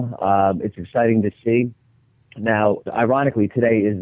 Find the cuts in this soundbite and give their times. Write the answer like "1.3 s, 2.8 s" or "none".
2.9 s